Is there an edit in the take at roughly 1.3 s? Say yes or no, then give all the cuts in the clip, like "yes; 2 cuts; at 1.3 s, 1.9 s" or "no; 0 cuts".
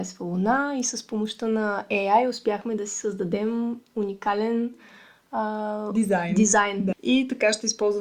no; 1 cut; at 6.9 s